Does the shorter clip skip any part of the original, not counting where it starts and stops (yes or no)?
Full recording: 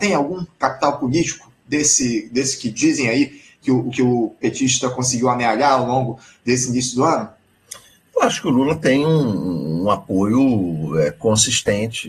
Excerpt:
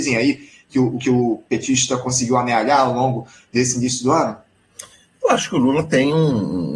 no